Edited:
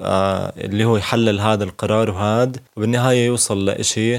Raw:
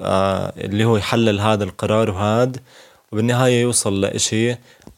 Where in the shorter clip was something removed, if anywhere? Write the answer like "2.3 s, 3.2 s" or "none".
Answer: 2.7 s